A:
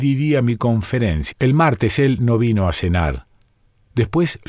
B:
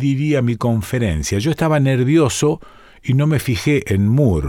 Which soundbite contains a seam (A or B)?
A